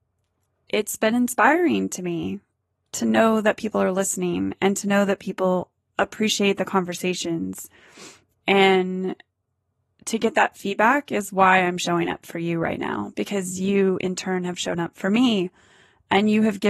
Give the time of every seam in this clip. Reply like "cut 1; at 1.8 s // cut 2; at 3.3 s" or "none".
none